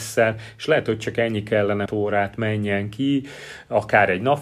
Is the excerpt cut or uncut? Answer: cut